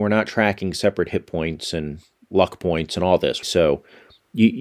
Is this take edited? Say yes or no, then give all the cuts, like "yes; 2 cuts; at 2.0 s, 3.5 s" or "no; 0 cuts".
yes; 1 cut; at 3.4 s